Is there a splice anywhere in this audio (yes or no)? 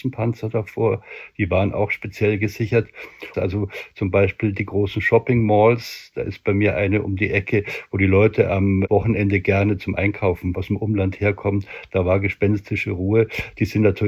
yes